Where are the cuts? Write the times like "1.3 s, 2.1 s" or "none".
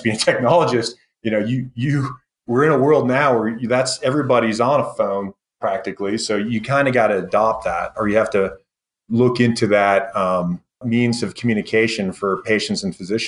10.8 s